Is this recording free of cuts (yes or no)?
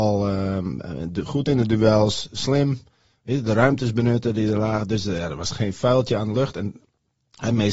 yes